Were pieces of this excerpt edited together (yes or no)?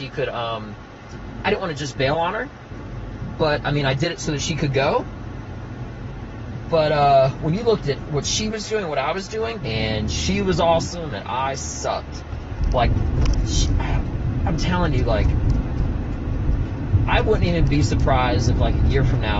yes